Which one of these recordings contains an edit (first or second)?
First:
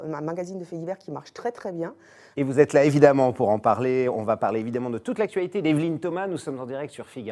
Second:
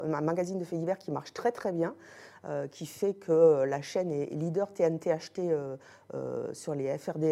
first